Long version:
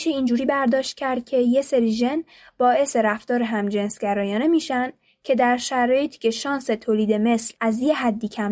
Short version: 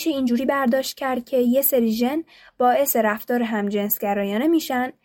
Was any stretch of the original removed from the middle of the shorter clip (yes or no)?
no